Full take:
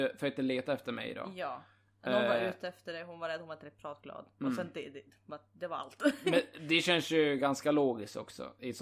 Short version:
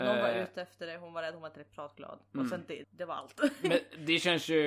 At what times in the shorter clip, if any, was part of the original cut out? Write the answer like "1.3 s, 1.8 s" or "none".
2.8 s